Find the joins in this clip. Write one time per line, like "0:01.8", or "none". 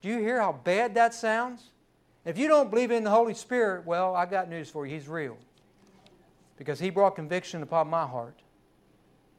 none